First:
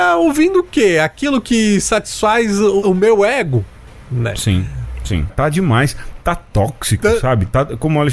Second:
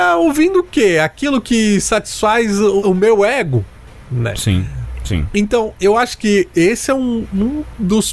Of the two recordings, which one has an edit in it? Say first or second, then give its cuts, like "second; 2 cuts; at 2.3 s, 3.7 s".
first; 1 cut; at 5.3 s